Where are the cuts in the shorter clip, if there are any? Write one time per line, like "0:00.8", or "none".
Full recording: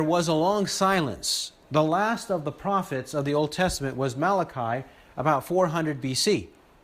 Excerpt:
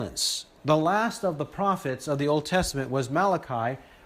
none